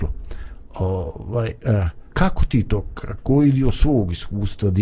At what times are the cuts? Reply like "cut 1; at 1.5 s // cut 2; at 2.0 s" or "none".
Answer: cut 1; at 2.1 s // cut 2; at 3.2 s